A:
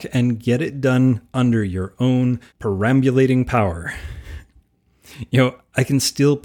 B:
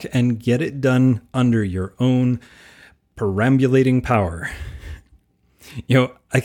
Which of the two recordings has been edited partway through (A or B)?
A